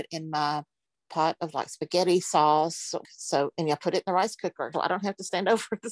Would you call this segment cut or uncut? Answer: cut